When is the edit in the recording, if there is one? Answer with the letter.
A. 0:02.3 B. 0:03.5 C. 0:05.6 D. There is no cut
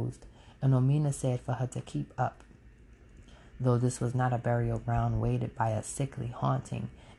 B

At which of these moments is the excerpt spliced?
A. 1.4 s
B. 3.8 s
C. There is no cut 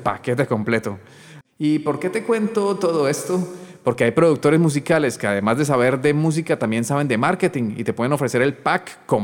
A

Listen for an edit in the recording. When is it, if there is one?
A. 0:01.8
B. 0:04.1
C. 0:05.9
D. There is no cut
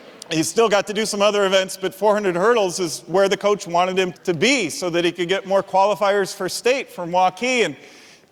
B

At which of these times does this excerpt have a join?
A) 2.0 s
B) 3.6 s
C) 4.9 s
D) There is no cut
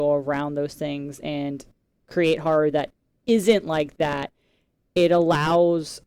D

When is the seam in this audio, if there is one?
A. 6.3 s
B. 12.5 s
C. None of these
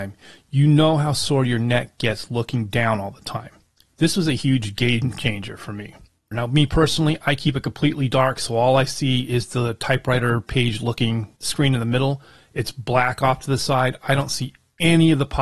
A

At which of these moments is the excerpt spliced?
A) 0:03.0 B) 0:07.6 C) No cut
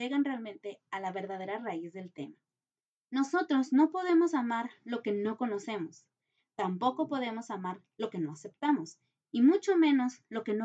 A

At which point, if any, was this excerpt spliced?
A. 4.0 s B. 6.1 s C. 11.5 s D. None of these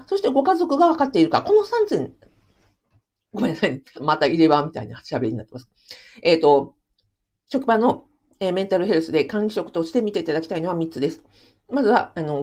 A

